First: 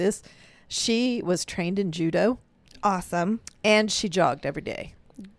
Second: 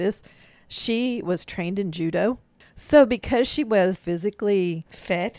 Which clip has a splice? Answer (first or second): second